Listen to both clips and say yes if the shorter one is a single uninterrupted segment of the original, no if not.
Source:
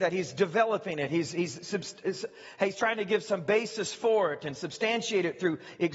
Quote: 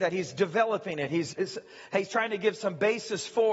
no